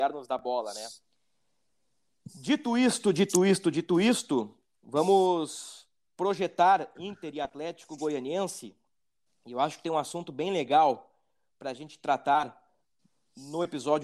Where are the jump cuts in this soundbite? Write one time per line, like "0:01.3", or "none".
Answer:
none